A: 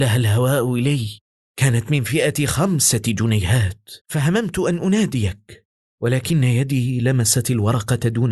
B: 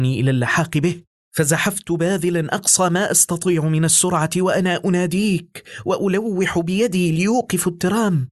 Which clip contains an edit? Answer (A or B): A